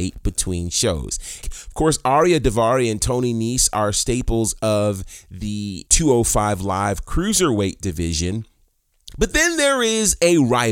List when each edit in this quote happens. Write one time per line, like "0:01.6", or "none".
0:01.4